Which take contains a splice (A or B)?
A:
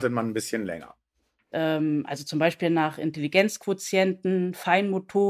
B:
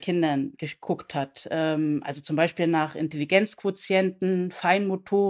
A